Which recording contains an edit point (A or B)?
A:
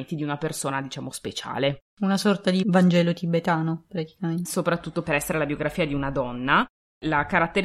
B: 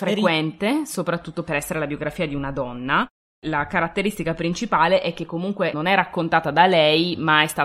A